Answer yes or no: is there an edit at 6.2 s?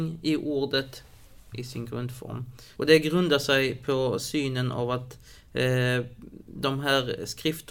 no